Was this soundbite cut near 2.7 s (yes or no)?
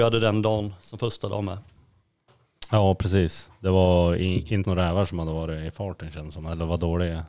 no